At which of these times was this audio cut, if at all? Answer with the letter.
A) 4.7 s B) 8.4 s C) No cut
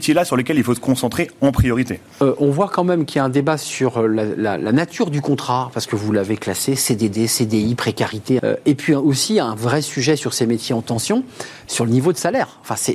B